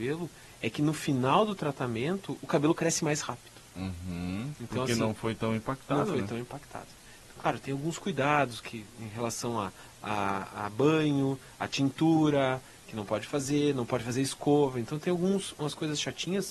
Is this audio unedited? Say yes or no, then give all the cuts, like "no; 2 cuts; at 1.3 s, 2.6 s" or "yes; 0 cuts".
yes; 0 cuts